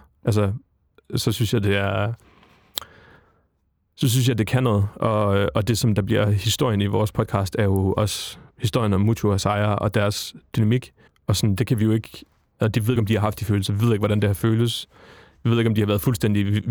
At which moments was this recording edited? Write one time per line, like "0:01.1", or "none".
0:11.1
0:13.0